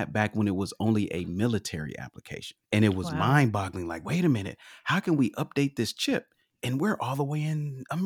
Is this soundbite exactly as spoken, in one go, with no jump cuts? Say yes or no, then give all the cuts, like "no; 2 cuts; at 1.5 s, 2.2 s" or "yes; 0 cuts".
no; 1 cut; at 2.6 s